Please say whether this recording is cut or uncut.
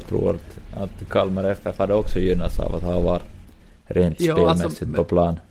uncut